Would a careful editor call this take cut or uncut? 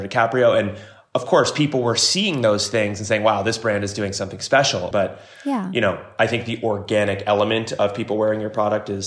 cut